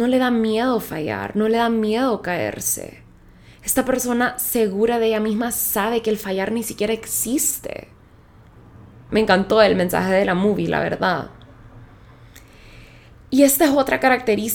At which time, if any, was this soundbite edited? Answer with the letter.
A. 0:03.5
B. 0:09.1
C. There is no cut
B